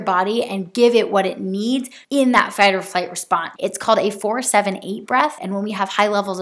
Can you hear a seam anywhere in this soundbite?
yes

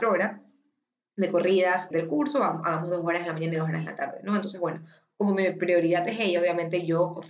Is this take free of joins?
no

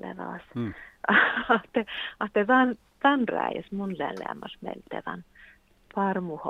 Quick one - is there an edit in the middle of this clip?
yes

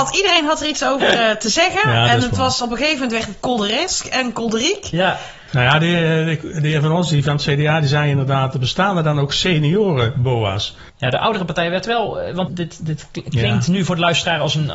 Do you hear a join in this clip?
yes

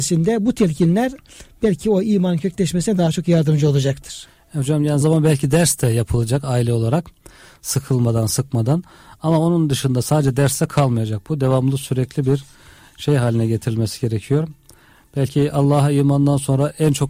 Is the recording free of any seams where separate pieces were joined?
no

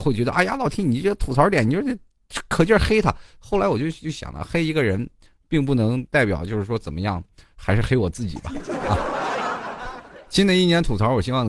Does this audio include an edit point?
no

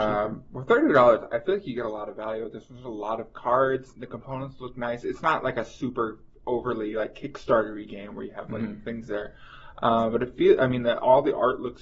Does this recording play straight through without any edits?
yes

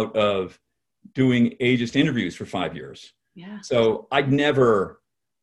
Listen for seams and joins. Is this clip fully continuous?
yes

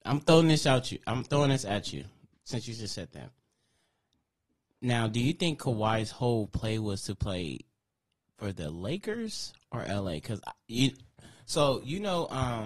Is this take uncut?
yes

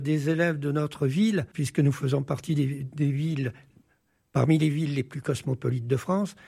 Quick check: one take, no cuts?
no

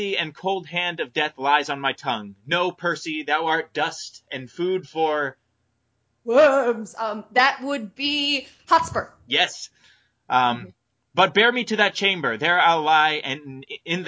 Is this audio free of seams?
yes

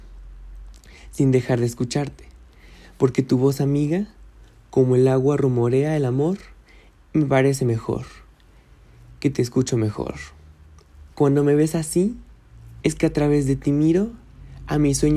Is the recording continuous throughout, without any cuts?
no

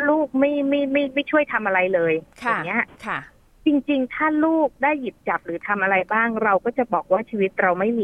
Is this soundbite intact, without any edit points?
yes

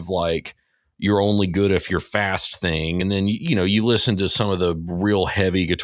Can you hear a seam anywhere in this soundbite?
no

